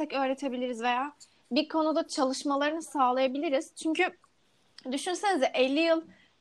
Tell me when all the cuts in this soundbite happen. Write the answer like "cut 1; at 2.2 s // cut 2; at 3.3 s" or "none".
none